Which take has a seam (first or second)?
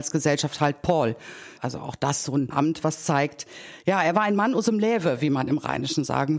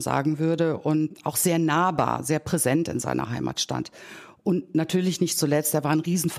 first